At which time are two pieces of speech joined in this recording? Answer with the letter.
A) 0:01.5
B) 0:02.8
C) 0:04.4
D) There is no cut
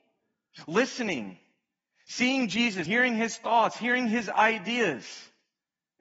B